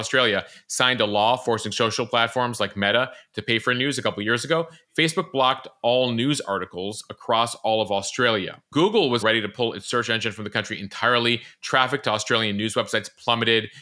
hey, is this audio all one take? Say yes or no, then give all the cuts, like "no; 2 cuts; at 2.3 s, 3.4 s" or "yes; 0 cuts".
no; 1 cut; at 9.2 s